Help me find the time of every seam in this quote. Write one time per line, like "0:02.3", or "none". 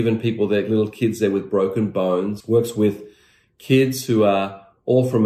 0:02.4